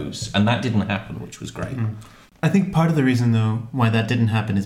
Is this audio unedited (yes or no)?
yes